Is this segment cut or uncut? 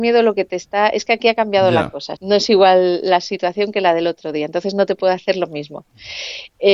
cut